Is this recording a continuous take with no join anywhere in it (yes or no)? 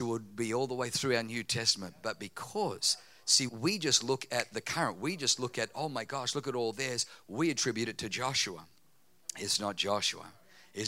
no